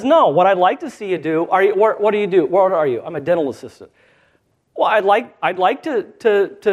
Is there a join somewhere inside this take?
no; 0 cuts

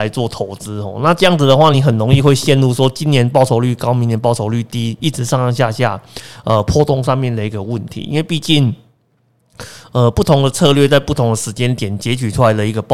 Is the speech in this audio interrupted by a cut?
no; 0 cuts

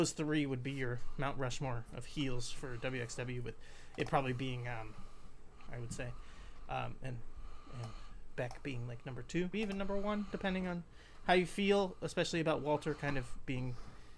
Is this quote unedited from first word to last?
no; 2 cuts; at 5.7 s, 9.5 s

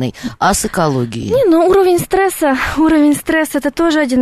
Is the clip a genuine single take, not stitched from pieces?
yes; 0 cuts

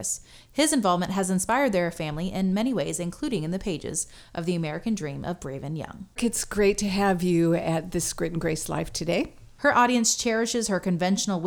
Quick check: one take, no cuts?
no; 2 cuts; at 6.2 s, 9.6 s

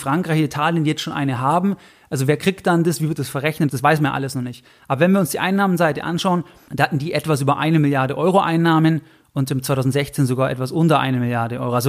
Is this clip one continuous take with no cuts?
no; 2 cuts; at 3.7 s, 6.7 s

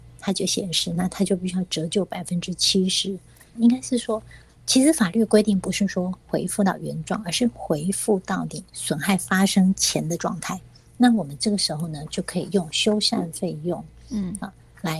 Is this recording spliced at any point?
yes; 2 cuts; at 3.6 s, 10.9 s

